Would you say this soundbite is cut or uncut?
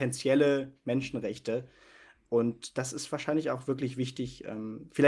uncut